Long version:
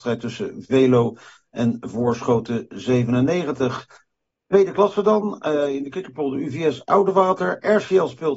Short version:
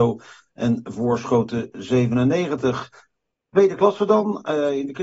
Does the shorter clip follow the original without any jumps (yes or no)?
yes